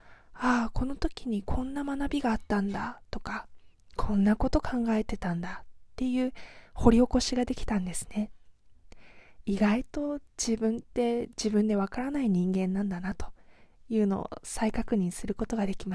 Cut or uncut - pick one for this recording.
uncut